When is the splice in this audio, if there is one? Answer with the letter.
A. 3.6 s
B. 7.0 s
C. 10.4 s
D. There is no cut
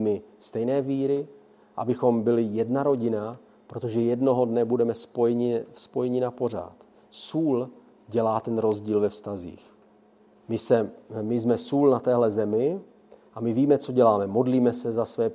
C